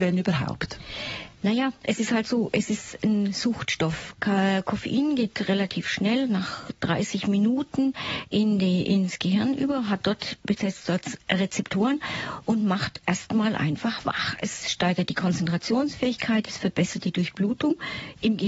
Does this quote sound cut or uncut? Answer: uncut